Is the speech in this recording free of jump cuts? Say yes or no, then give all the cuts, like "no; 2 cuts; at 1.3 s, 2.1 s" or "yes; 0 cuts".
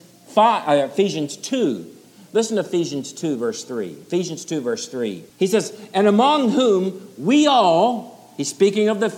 no; 1 cut; at 5.3 s